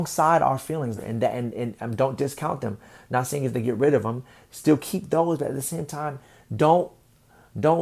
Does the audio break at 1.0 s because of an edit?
yes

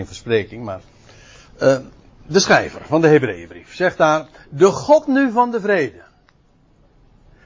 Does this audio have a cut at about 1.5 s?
yes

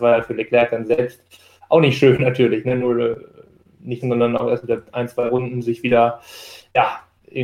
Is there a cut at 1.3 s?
no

